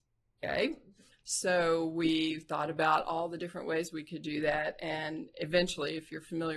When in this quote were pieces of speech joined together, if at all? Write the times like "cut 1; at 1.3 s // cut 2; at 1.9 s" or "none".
none